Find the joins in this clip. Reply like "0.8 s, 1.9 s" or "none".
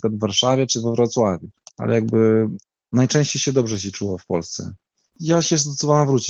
5.1 s